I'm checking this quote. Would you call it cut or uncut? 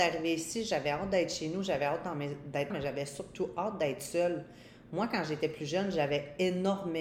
cut